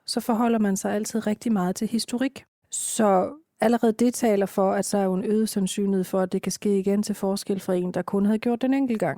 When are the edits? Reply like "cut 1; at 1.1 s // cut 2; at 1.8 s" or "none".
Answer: cut 1; at 2.6 s // cut 2; at 4.9 s